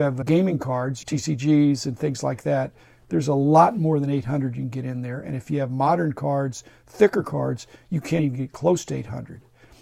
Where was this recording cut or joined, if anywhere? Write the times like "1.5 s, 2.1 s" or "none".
none